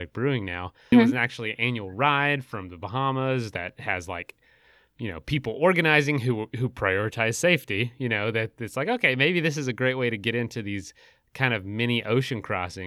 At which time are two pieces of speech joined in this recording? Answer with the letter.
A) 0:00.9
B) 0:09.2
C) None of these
A